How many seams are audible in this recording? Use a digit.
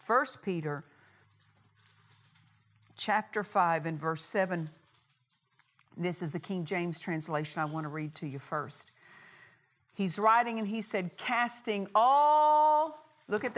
0